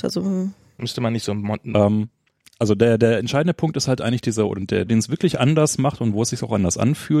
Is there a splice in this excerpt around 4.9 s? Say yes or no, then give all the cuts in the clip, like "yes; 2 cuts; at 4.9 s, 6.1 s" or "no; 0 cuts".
yes; 1 cut; at 4.9 s